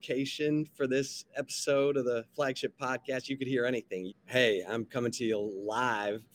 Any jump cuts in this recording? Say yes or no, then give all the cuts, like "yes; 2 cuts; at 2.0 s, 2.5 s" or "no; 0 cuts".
yes; 1 cut; at 4.1 s